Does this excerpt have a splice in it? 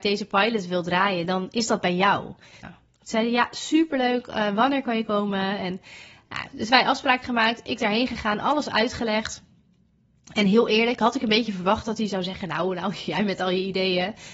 yes; 1 cut; at 2.6 s

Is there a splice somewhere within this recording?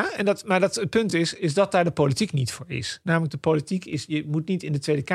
no; 0 cuts

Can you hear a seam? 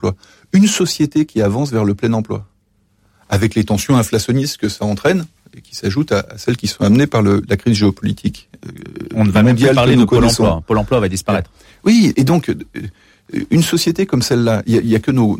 yes; 1 cut; at 12.1 s

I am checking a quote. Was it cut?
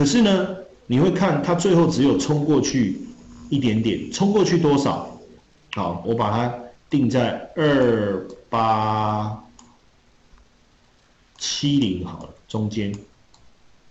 yes; 1 cut; at 6.0 s

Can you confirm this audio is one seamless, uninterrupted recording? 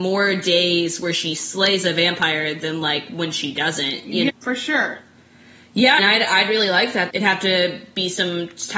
no; 3 cuts; at 4.3 s, 6.0 s, 7.1 s

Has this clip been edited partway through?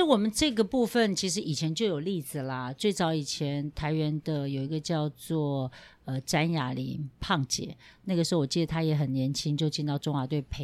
no; 0 cuts

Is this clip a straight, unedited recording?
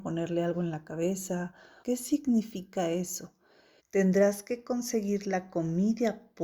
no; 2 cuts; at 1.8 s, 3.8 s

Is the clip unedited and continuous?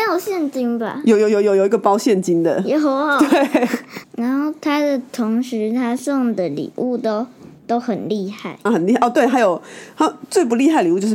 no; 2 cuts; at 4.0 s, 8.7 s

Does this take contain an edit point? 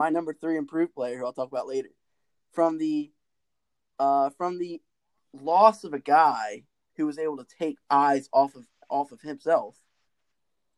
no; 0 cuts

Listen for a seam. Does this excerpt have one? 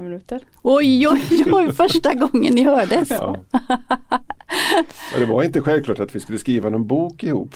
no; 0 cuts

